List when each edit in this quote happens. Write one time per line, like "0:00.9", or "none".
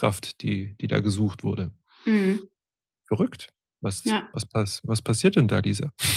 none